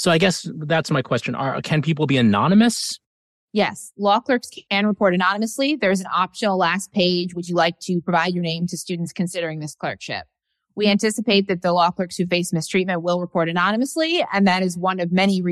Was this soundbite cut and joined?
no; 0 cuts

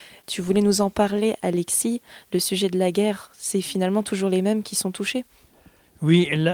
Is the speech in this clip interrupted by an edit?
no; 0 cuts

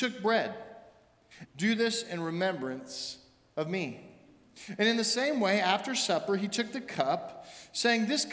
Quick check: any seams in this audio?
yes; 1 cut; at 1.5 s

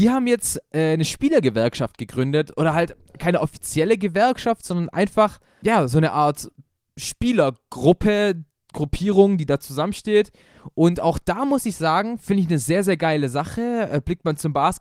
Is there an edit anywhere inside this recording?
yes; 1 cut; at 5.6 s

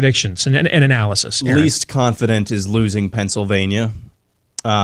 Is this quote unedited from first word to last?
yes; 0 cuts

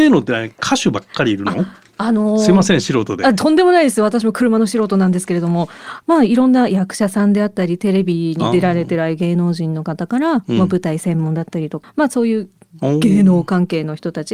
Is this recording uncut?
no; 1 cut; at 11.8 s

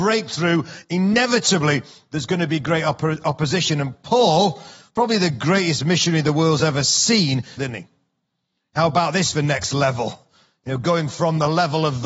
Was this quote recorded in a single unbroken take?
no; 1 cut; at 7.6 s

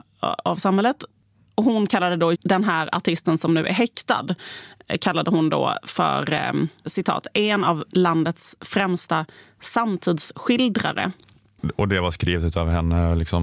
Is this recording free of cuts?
no; 2 cuts; at 2.3 s, 6.9 s

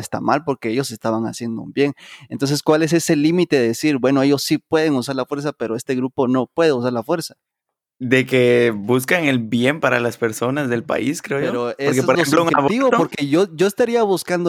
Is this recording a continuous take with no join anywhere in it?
yes; 0 cuts

